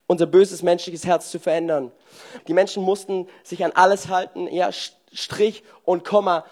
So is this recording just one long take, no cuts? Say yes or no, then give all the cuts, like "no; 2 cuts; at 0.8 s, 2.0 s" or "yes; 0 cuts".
no; 1 cut; at 2.4 s